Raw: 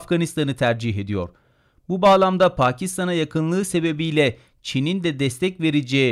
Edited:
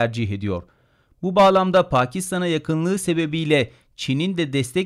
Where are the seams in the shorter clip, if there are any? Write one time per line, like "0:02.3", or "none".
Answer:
none